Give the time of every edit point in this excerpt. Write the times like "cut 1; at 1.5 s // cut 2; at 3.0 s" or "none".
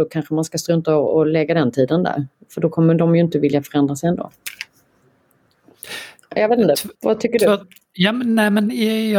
none